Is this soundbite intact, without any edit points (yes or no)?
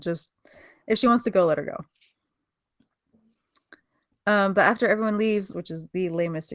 no